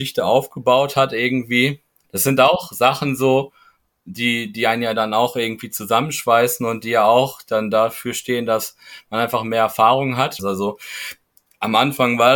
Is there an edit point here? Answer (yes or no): yes